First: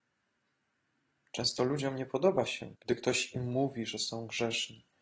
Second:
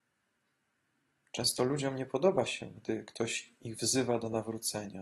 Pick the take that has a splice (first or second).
first